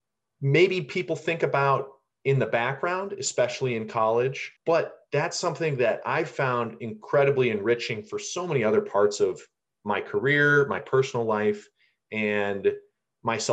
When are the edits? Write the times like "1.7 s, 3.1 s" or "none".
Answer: 4.6 s